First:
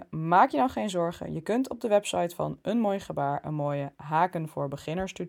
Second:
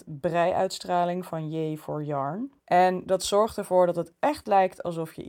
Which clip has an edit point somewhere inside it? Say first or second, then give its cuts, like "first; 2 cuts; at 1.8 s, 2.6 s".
second; 1 cut; at 2.6 s